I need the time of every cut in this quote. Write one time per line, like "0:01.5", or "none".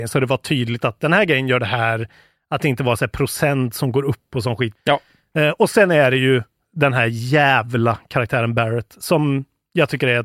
0:04.8

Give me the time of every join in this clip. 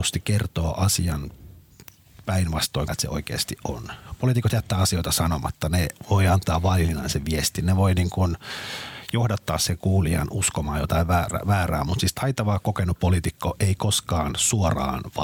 0:02.9

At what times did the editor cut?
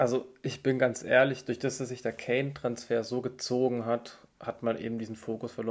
none

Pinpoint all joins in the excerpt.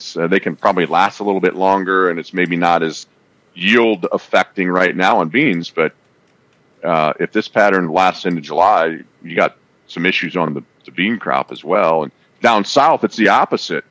none

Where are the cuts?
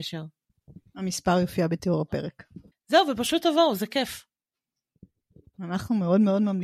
none

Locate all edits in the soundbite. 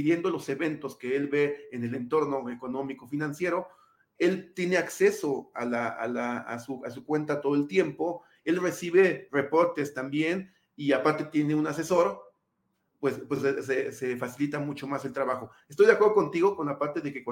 none

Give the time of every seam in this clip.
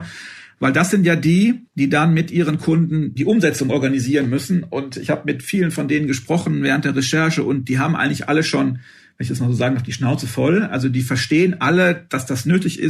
0:01.7

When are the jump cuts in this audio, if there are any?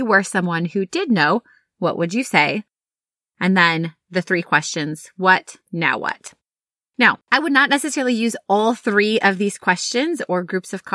0:05.6
0:07.2

